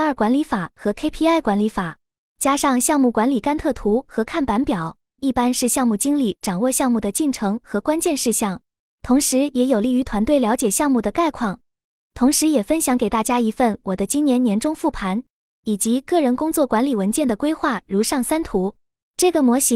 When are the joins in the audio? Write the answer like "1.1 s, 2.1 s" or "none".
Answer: 5.2 s